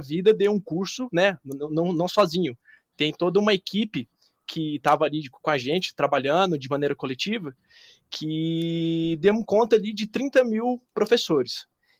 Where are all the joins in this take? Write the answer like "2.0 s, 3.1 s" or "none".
none